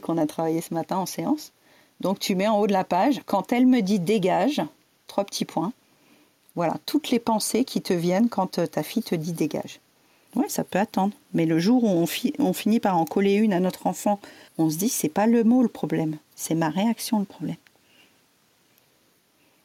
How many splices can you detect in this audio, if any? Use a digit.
2